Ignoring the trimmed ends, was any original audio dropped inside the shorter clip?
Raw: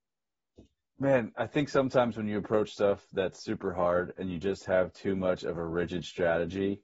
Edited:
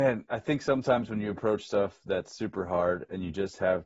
no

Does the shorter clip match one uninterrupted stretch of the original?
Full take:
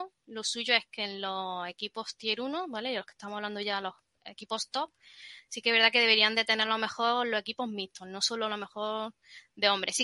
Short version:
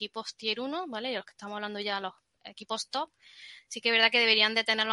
yes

